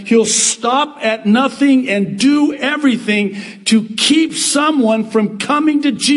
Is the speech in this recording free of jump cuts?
yes; 0 cuts

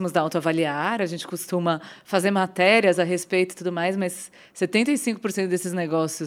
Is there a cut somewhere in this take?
no; 0 cuts

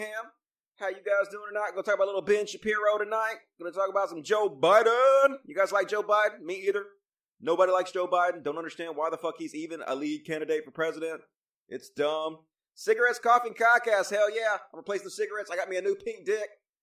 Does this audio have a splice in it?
no; 0 cuts

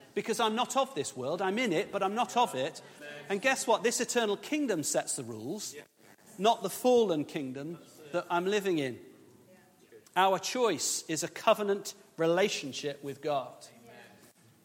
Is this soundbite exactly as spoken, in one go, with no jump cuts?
no; 2 cuts; at 3.0 s, 10.1 s

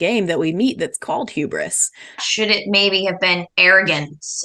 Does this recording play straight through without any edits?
no; 1 cut; at 2.2 s

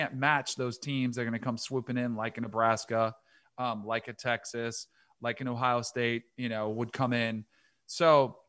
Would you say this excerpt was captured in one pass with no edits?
yes; 0 cuts

